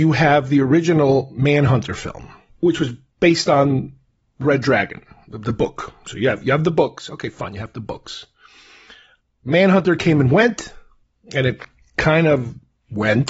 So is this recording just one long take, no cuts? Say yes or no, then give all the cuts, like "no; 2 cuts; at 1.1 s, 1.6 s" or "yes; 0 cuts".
yes; 0 cuts